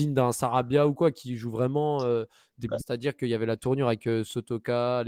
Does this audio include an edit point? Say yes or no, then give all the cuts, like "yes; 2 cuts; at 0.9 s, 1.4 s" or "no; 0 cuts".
yes; 1 cut; at 2.8 s